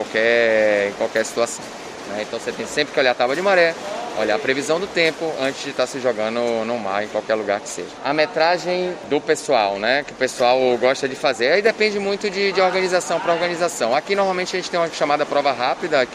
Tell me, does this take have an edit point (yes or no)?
no